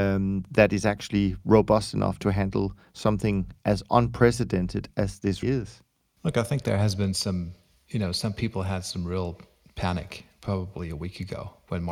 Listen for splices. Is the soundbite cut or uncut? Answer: cut